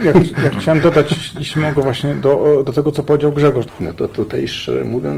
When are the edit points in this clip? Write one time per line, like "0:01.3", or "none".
0:03.7

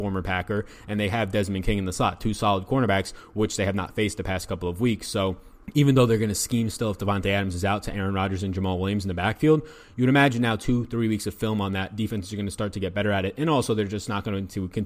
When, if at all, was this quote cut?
0:05.6

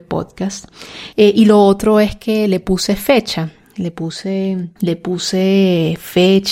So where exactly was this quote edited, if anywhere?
0:01.1
0:04.8

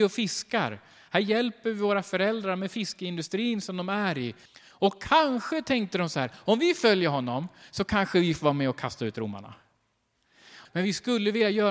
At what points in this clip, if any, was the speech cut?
0:04.5
0:10.6

